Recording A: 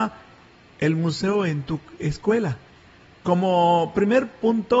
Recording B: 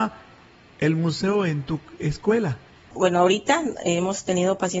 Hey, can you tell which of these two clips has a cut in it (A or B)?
B